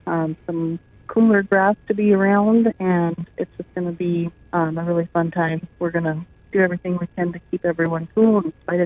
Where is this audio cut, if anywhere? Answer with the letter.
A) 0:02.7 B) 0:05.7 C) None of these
C